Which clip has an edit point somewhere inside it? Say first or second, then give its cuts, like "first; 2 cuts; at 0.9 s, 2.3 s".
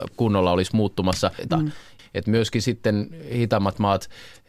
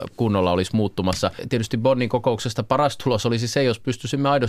first; 1 cut; at 1.5 s